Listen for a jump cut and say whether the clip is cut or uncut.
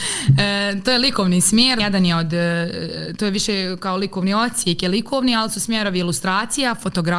cut